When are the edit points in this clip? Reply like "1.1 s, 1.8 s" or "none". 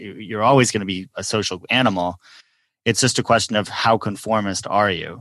none